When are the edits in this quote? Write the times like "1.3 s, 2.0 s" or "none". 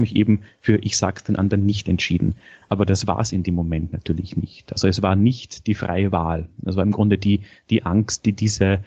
none